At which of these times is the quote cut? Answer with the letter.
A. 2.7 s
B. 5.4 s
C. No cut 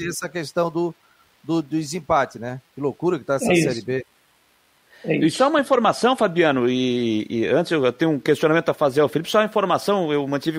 C